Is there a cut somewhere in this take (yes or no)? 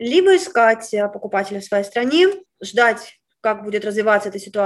yes